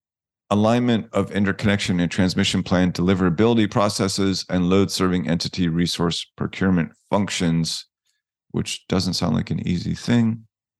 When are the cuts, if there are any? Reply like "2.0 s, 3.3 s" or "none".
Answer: none